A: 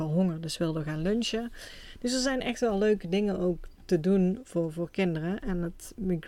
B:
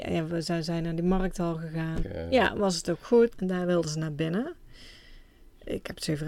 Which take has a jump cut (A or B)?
B